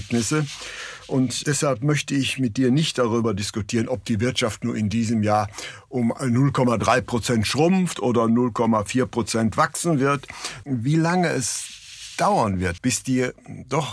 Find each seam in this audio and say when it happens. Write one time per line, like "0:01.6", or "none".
0:10.6
0:12.8

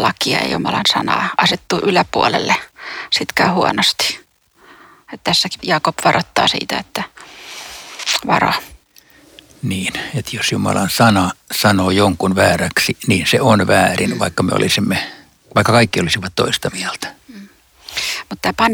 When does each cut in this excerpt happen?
none

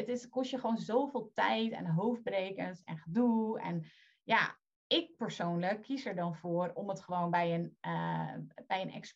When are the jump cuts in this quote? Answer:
none

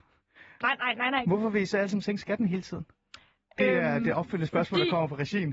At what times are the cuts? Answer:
0:01.2

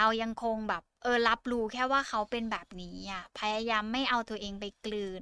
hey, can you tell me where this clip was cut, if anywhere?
0:00.9

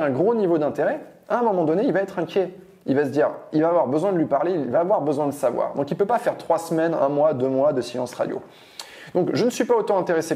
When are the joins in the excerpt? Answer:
none

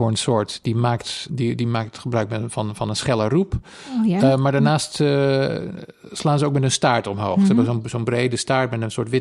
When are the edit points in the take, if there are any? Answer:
0:01.3

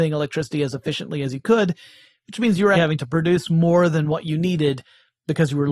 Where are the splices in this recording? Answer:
0:02.7

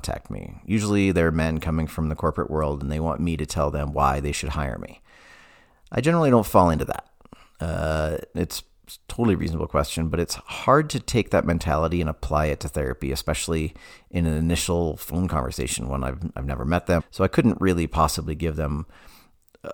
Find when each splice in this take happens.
0:08.3
0:17.0

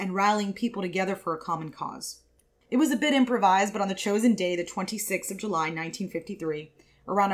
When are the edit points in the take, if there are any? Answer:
0:02.5

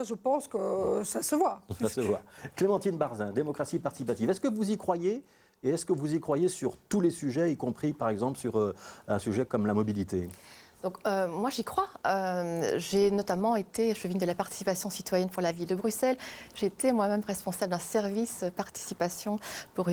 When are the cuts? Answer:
none

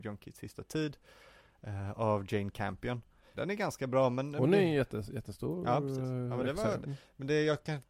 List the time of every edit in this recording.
0:03.3
0:06.8

